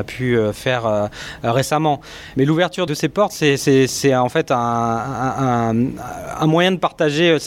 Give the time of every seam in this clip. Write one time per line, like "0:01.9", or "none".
none

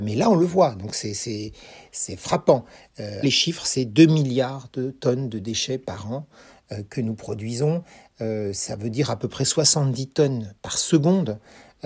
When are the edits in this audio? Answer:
0:03.2

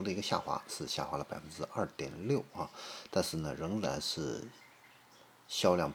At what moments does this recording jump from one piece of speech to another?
none

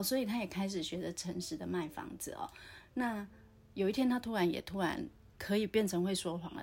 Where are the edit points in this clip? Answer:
none

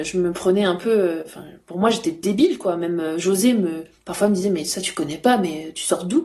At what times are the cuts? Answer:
none

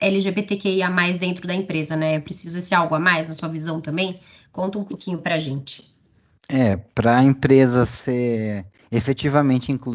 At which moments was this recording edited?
none

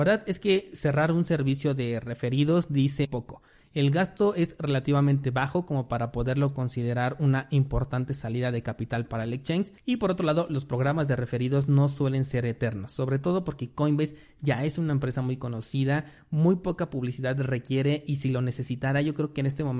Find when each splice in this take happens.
0:03.0

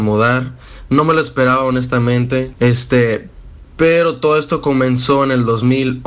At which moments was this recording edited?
0:02.5

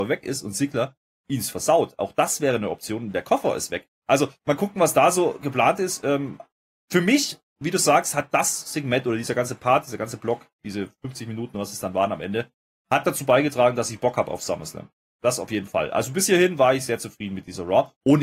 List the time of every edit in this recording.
none

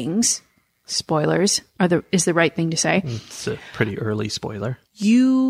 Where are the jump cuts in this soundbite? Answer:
0:01.8

